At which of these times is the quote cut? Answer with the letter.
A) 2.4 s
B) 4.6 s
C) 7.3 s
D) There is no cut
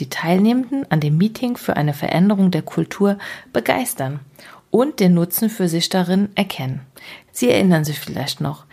C